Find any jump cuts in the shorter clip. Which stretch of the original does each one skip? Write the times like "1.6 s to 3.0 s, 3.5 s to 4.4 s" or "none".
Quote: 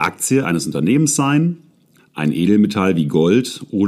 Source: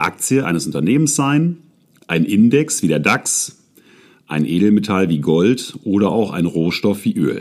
2.0 s to 4.1 s